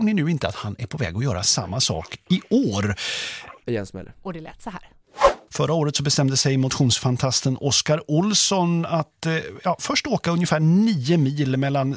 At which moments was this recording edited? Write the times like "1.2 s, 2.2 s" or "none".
3.6 s, 5.5 s